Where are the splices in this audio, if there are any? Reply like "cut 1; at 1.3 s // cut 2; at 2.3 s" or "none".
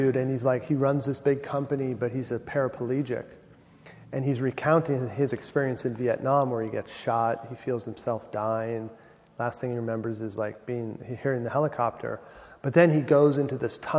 none